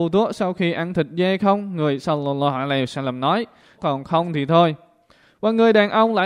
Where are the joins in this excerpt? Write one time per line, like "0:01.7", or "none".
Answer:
0:03.8